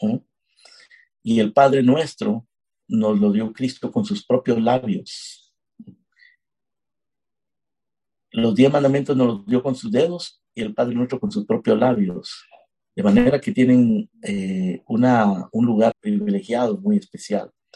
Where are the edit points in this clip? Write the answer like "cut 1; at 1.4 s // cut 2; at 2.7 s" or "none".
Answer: cut 1; at 14.1 s // cut 2; at 15.9 s